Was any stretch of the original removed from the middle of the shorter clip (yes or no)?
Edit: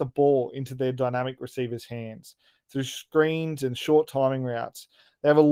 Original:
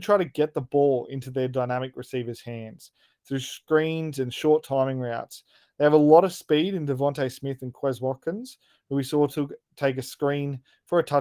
no